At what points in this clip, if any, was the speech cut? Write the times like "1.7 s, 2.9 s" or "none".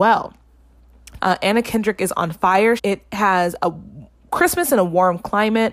1.2 s, 2.8 s